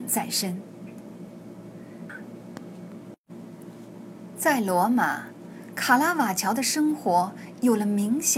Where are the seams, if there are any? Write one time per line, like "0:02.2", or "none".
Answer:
0:02.1